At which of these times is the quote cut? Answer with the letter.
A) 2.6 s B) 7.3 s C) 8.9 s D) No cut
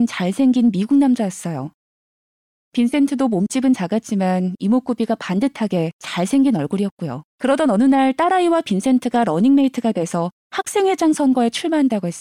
B